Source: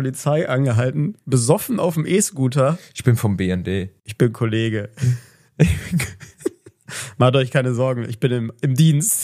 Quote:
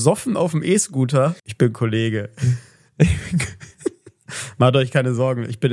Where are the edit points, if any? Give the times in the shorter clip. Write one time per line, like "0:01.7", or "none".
0:01.4